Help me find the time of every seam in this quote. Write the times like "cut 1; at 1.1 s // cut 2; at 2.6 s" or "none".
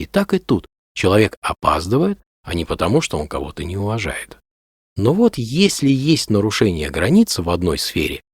cut 1; at 2.3 s